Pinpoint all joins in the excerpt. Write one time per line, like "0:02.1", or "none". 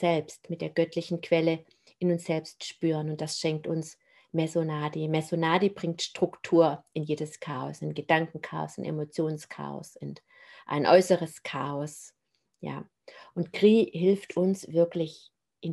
none